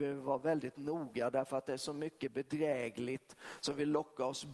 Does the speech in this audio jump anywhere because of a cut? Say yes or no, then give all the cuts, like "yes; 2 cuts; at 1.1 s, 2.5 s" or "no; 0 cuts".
no; 0 cuts